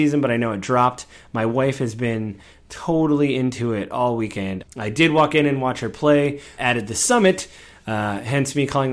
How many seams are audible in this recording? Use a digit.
2